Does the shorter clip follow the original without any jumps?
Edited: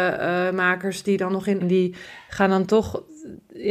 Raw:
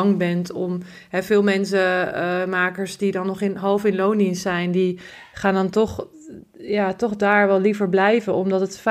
no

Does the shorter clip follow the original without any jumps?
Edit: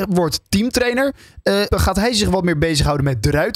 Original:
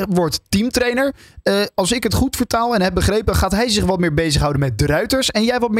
no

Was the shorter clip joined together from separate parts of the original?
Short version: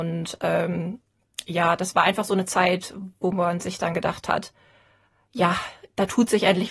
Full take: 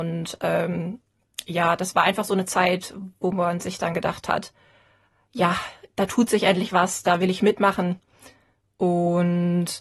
no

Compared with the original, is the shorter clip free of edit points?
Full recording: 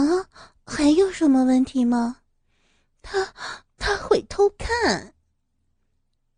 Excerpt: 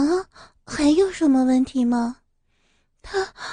yes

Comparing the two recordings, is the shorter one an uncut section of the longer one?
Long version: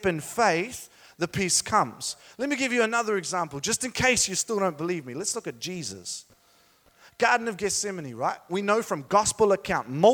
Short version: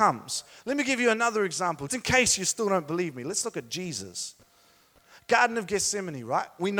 no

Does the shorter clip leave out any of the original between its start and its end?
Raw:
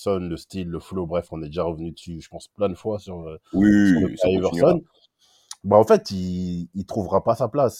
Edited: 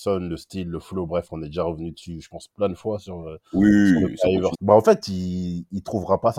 yes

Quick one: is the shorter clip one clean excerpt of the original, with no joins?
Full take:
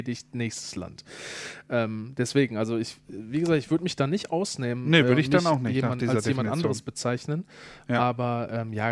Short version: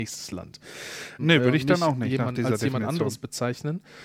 no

